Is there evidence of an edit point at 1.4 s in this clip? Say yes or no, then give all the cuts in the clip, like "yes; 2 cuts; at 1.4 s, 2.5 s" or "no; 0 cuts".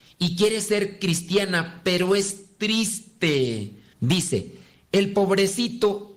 no; 1 cut; at 3.9 s